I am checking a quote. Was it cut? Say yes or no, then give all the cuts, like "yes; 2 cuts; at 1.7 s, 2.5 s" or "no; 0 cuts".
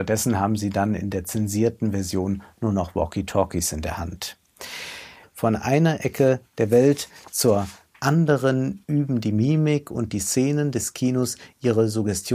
yes; 1 cut; at 5.2 s